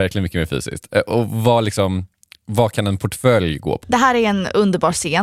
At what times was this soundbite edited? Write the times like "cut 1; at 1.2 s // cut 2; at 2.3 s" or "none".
cut 1; at 3.8 s